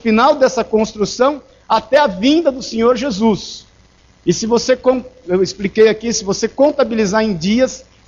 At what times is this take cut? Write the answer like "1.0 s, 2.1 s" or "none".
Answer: none